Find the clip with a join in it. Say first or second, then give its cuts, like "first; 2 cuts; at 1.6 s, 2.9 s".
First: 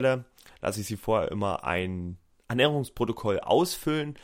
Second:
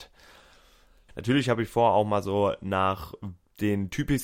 second; 1 cut; at 1.1 s